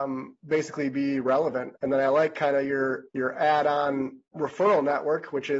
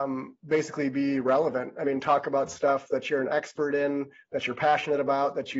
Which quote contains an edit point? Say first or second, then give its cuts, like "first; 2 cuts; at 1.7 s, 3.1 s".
first; 3 cuts; at 1.7 s, 3.1 s, 4.3 s